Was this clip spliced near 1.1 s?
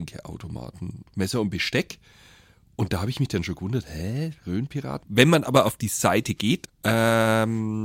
yes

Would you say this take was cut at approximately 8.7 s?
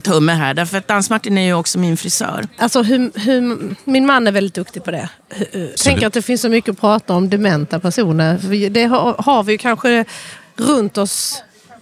no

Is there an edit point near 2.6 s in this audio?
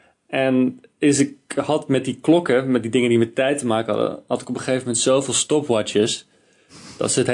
no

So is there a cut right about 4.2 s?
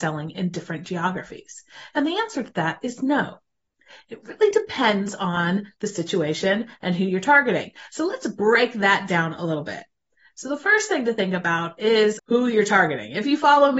no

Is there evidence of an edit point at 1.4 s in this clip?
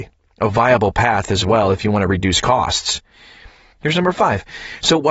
no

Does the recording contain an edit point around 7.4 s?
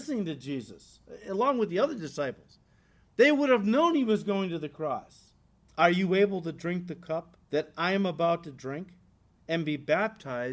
yes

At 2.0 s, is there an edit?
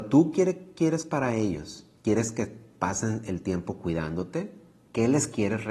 yes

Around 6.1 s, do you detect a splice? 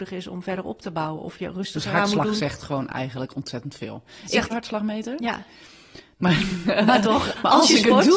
yes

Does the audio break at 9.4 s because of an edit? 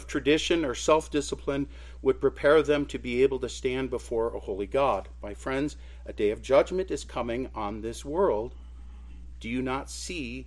no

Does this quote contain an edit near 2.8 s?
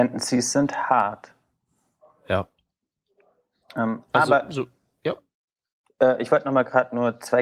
no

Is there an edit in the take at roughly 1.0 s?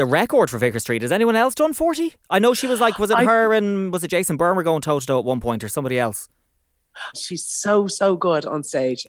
no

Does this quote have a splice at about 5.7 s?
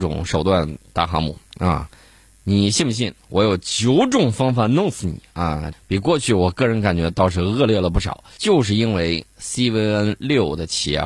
yes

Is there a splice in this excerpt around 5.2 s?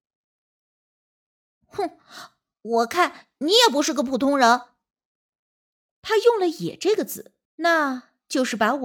no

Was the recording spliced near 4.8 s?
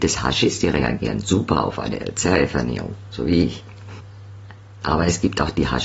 yes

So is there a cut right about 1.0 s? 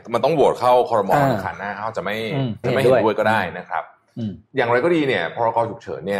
no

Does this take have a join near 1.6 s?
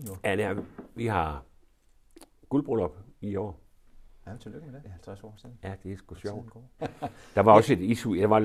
no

